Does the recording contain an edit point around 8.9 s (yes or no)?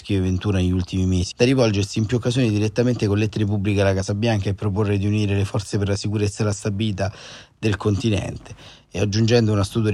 no